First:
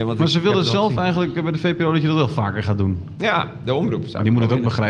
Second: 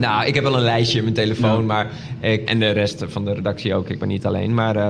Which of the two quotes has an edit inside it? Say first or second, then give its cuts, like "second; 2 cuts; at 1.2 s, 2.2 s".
second; 1 cut; at 2.5 s